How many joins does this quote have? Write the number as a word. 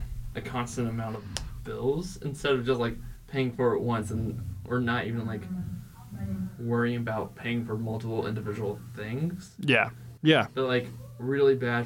one